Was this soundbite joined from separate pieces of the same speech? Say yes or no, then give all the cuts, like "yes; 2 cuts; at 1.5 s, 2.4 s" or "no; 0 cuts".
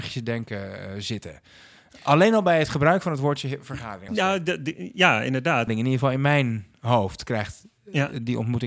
yes; 2 cuts; at 4.1 s, 5.7 s